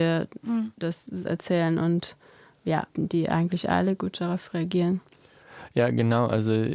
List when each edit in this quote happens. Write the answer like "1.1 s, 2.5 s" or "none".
2.9 s